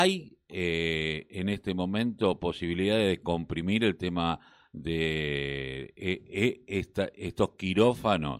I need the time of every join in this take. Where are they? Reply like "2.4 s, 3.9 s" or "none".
none